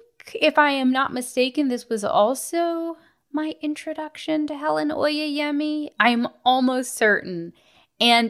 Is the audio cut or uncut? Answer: uncut